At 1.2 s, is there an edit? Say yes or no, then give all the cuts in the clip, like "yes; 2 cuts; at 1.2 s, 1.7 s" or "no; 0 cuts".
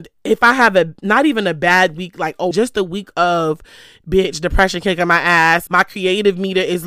no; 2 cuts; at 2.5 s, 5.7 s